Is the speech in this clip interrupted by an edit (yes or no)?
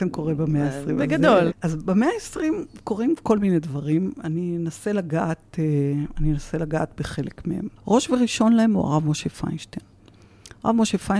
yes